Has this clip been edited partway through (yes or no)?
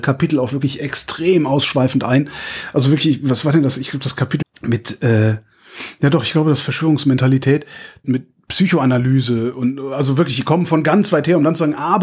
yes